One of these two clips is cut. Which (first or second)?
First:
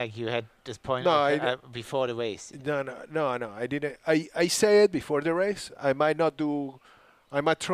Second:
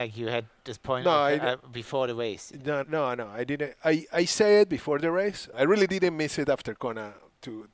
second